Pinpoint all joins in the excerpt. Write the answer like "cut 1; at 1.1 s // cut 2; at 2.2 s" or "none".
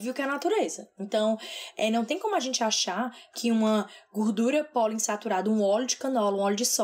none